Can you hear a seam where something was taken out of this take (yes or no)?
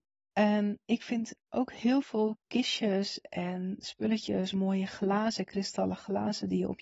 no